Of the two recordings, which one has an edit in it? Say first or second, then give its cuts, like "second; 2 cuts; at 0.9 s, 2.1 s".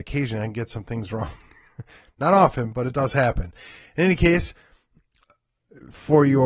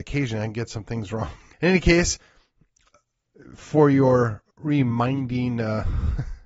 second; 2 cuts; at 1.5 s, 4.5 s